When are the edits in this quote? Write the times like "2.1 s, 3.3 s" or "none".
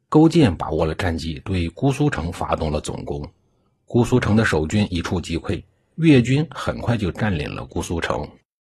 none